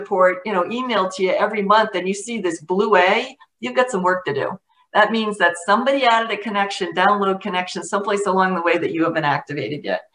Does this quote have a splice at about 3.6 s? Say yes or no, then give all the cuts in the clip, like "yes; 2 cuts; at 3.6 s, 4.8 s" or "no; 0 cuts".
no; 0 cuts